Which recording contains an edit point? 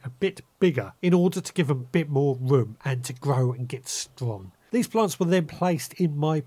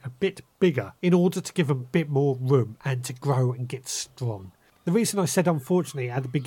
second; 1 cut; at 4.7 s

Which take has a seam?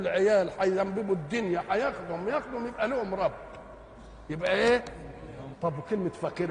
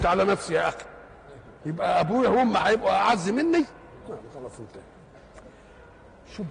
first; 1 cut; at 5.5 s

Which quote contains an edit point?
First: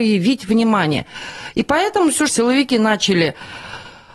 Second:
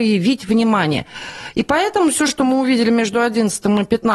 first; 1 cut; at 2.3 s

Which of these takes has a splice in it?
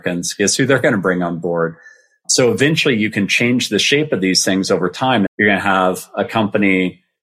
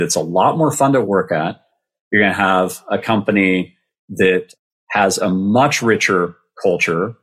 first; 1 cut; at 5.3 s

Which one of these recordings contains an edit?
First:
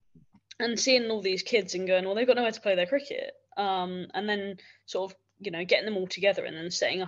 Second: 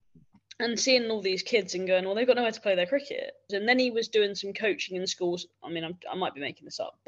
second; 1 cut; at 3.5 s

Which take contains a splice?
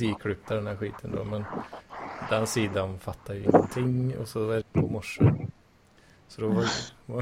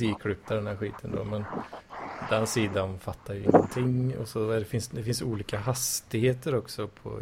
first; 1 cut; at 4.6 s

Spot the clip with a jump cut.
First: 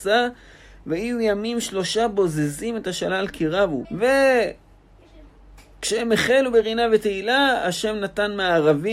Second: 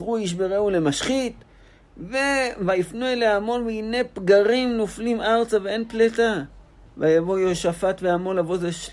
first; 1 cut; at 3.8 s

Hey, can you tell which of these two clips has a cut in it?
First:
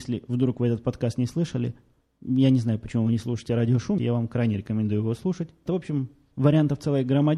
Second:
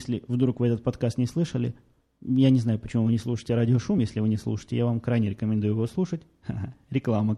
first; 2 cuts; at 4.0 s, 5.7 s

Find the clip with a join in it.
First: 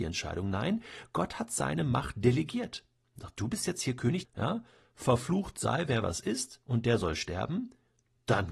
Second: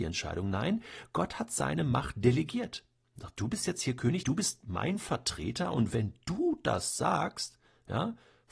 first; 1 cut; at 4.2 s

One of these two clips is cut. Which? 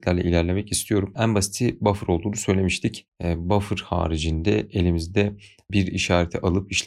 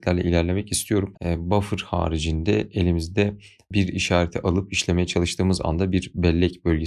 second; 1 cut; at 1.1 s

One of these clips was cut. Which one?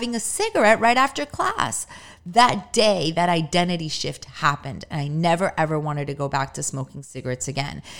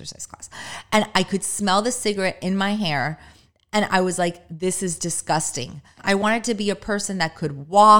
second; 1 cut; at 6.0 s

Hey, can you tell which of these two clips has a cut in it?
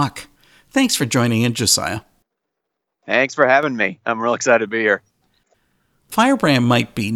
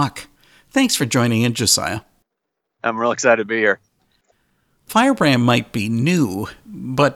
second; 1 cut; at 2.8 s

